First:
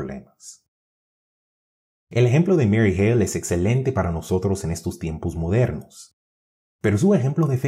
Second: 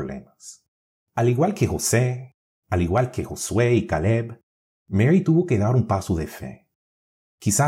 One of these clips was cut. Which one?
second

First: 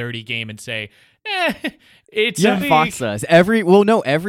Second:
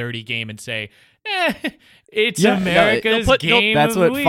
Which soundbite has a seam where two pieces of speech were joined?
first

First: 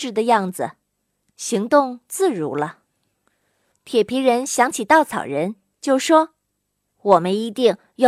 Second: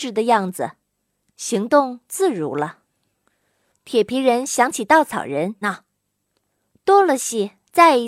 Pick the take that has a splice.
second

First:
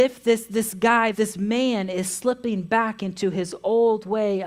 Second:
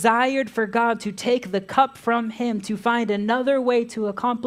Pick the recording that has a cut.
first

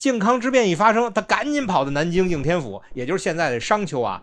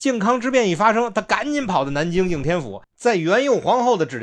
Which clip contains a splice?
second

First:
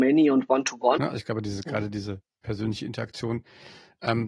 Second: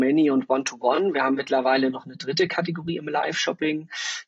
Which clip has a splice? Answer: first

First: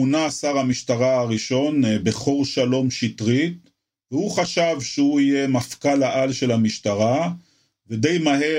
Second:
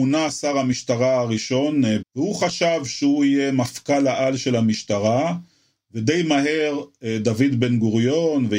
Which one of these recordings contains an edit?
second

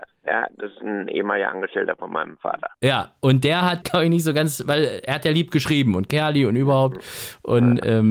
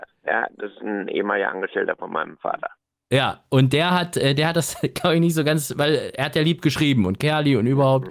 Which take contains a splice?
first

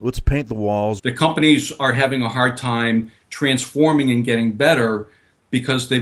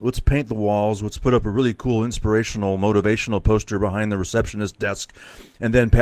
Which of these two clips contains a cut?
first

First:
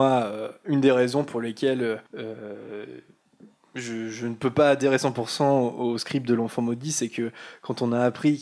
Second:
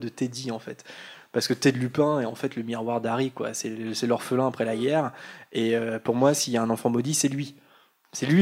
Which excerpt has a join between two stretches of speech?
first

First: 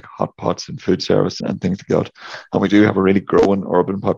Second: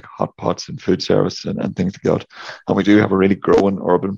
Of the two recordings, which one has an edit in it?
first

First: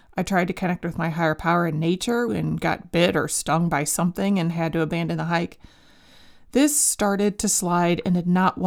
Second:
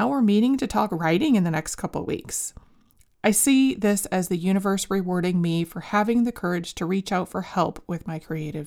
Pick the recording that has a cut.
first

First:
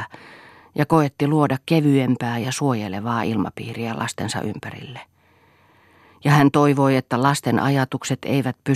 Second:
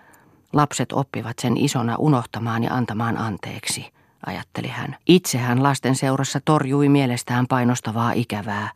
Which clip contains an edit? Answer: second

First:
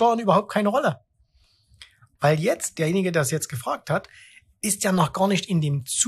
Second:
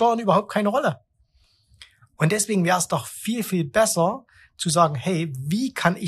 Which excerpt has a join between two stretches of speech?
first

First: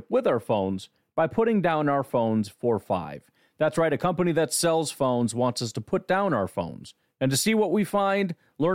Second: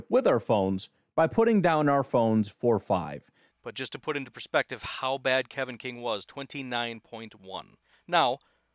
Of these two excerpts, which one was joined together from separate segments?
second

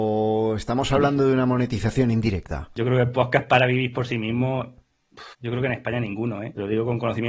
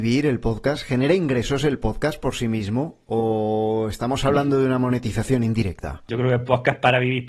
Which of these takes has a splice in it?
first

